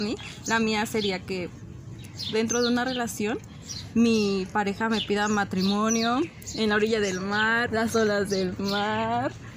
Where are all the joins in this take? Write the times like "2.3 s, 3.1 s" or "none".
7.7 s